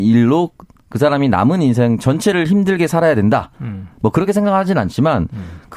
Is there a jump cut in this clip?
no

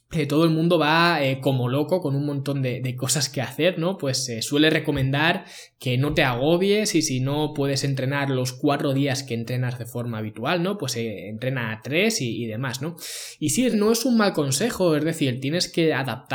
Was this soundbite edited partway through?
yes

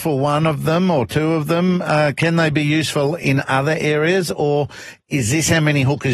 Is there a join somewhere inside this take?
no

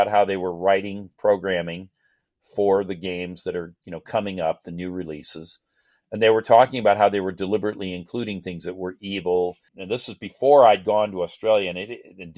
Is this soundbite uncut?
no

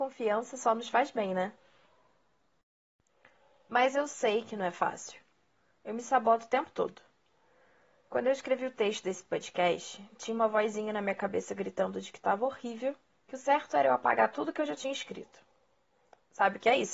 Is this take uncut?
yes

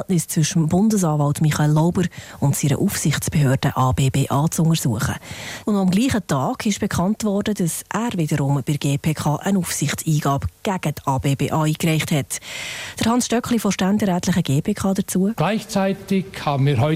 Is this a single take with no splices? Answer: no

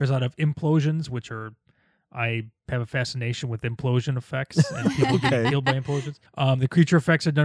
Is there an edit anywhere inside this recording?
yes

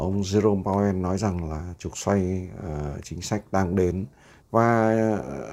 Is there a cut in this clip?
yes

